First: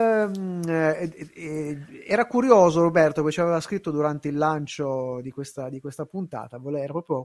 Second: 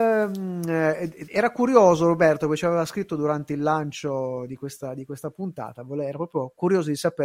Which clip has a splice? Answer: second; 1 cut; at 1.3 s

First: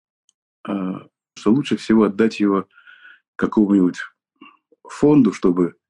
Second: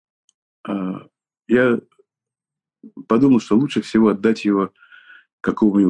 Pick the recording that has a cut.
first; 1 cut; at 1.4 s

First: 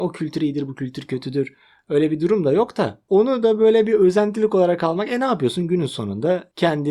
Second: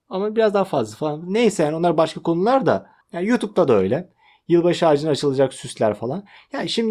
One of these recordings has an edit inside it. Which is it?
second; 1 cut; at 3.0 s

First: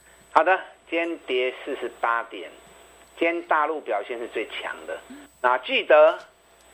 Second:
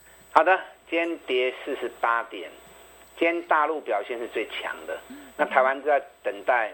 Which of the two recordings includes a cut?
first; 1 cut; at 5.3 s

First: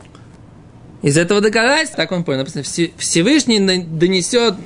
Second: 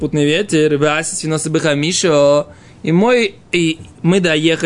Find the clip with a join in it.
first; 1 cut; at 1.9 s

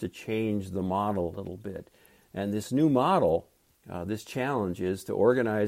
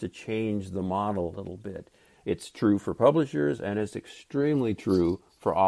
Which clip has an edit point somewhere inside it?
second; 1 cut; at 2.1 s

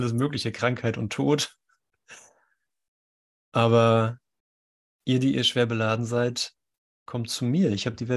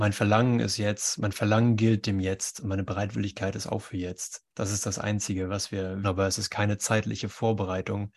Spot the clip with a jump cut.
second; 2 cuts; at 4.5 s, 6.0 s

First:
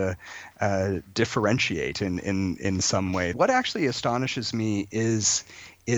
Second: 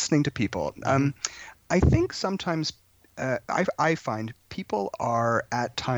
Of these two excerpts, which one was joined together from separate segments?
first; 1 cut; at 3.3 s

